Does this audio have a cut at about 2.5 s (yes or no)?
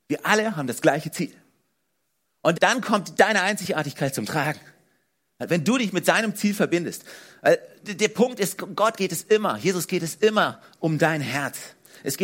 yes